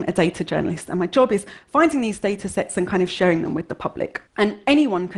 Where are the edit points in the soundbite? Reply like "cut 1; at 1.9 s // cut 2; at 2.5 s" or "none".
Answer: cut 1; at 4.3 s